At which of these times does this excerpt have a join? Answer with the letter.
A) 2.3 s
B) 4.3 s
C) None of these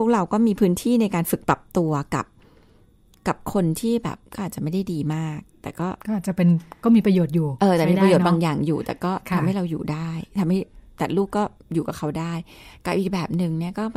B